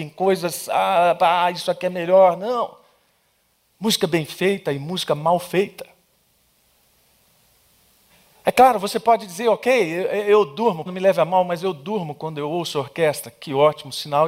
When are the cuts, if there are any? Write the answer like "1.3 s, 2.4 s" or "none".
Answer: 10.9 s

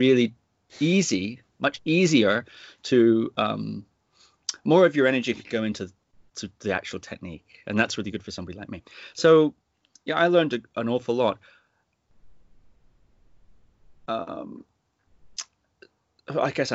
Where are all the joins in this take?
none

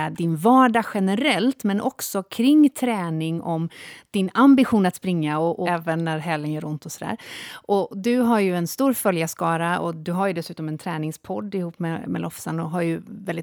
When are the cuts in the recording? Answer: 5.7 s

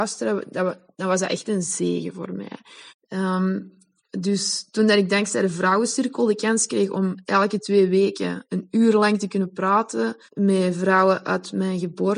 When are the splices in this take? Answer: 2.9 s, 10.3 s

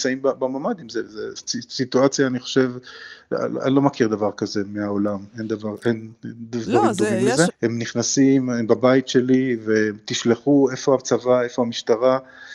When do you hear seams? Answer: 7.5 s

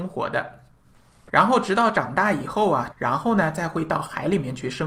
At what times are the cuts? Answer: 1.3 s, 2.9 s

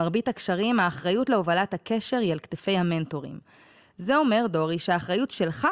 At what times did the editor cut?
none

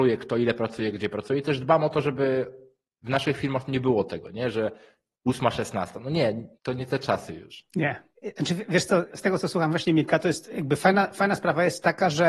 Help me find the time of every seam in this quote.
6.6 s

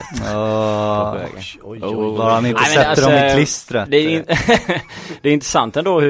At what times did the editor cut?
none

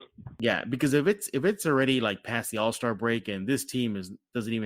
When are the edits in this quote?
none

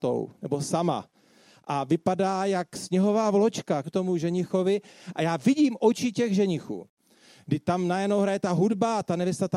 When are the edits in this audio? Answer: 3.8 s, 5.1 s

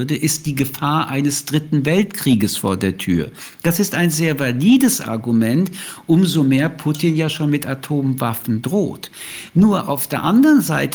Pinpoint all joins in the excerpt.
none

